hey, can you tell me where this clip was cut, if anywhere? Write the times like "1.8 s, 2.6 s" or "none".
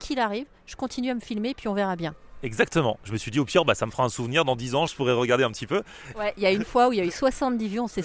4.9 s, 6.1 s